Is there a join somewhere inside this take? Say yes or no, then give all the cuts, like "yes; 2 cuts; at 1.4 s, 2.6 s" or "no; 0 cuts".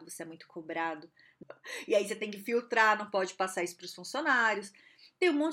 yes; 1 cut; at 1.4 s